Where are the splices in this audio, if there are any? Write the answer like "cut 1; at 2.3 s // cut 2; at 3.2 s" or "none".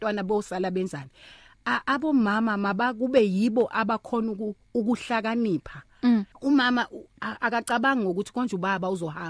cut 1; at 6.3 s